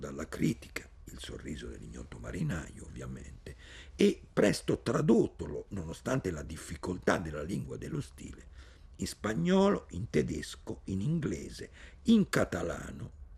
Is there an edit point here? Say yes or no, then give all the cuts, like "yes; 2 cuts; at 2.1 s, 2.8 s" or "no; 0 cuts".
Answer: no; 0 cuts